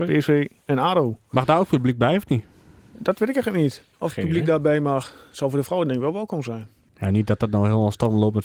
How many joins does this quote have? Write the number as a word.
two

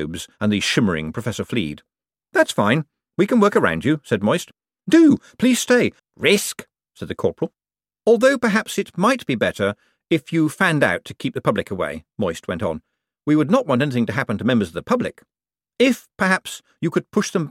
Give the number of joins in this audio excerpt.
one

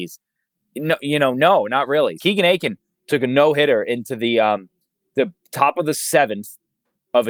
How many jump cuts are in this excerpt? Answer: one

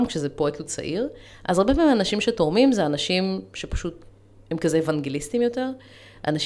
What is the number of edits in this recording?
zero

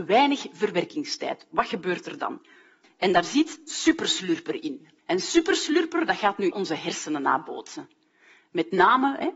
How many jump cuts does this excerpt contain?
three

